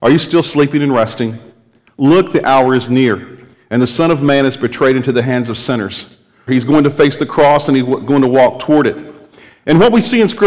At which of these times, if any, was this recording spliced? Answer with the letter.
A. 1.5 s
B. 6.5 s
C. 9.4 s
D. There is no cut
B